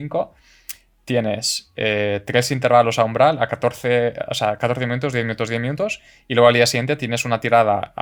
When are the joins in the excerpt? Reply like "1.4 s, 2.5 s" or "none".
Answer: none